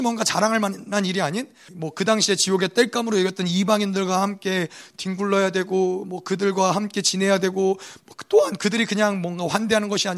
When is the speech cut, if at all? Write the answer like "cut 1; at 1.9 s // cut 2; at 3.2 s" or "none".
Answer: cut 1; at 1.7 s